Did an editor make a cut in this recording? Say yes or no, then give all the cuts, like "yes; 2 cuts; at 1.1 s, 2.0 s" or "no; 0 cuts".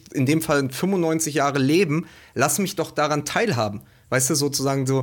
no; 0 cuts